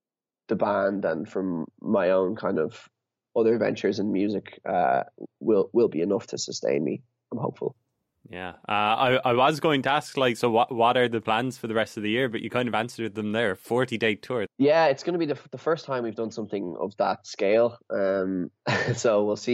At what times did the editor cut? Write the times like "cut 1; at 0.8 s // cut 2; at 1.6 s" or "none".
cut 1; at 14.5 s